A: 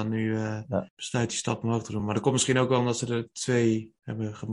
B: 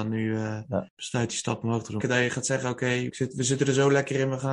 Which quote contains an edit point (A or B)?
B